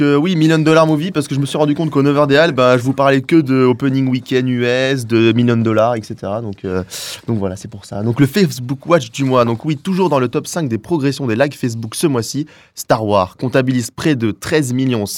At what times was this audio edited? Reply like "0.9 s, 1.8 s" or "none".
none